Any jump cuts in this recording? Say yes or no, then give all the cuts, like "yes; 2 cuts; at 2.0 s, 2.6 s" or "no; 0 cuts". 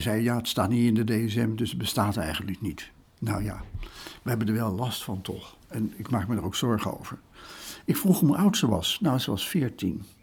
no; 0 cuts